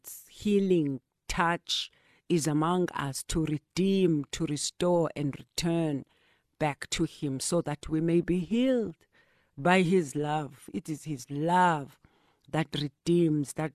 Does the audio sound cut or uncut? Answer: uncut